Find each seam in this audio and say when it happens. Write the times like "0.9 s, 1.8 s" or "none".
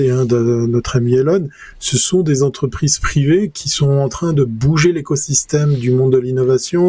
none